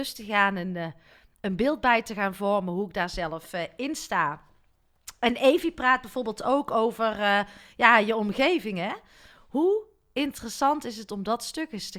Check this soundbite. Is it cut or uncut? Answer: uncut